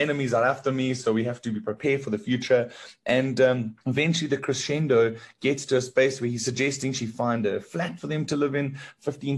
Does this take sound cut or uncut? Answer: cut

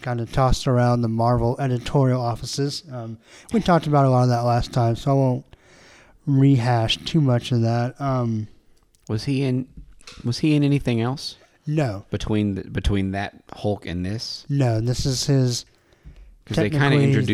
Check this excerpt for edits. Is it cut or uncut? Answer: uncut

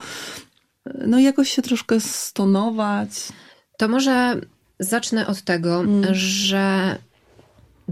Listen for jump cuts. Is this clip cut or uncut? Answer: uncut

